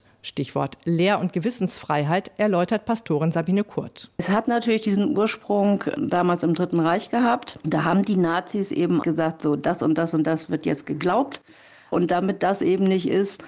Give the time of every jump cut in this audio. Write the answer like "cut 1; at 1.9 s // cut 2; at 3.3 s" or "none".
cut 1; at 9.0 s